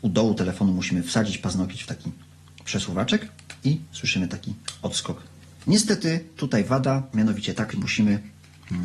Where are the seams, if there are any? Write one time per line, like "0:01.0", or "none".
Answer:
0:05.6
0:07.7